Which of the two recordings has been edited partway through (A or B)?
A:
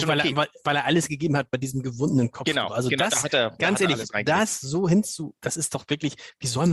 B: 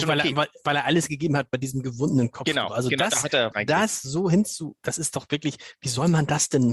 B